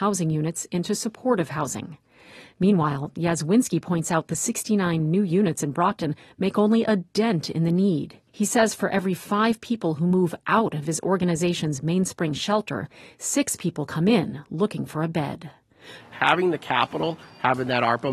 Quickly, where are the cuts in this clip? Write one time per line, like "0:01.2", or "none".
0:08.3
0:16.0